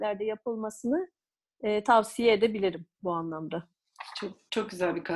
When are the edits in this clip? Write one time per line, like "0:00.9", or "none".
none